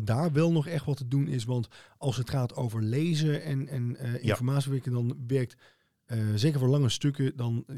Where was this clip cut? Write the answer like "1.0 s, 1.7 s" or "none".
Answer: none